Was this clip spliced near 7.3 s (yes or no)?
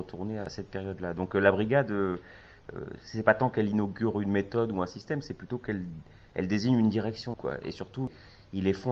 yes